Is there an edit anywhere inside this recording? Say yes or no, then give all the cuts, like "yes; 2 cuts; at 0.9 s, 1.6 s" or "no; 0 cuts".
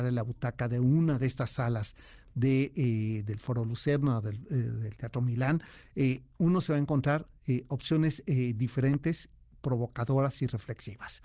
no; 0 cuts